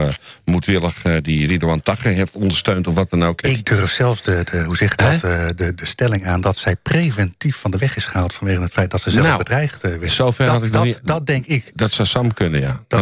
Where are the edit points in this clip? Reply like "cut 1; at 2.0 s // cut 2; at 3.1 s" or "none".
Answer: cut 1; at 3.4 s